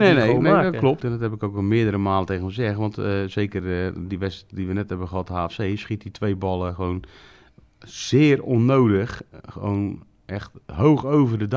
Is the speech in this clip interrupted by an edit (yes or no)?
yes